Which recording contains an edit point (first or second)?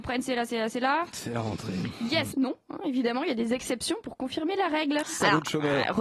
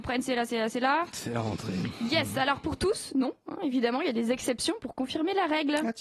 first